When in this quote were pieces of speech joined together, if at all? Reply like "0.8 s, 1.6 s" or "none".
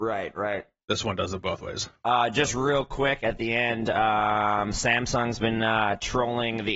none

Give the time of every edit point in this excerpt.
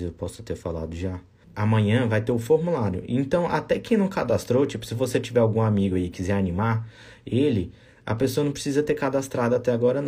1.4 s

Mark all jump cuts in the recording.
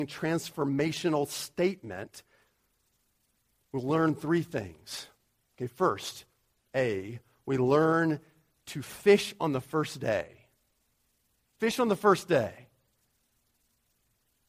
none

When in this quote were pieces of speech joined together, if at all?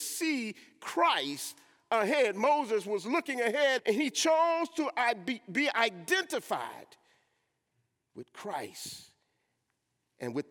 3.8 s

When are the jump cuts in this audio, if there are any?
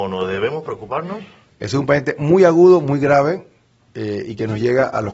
1.5 s

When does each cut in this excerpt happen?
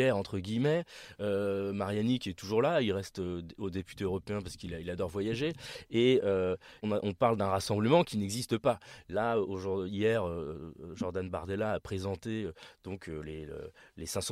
6.8 s

